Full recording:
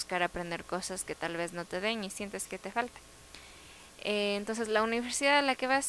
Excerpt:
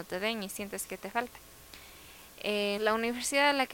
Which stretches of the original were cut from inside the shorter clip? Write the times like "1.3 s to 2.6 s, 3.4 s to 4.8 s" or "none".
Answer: 4.4 s to 4.7 s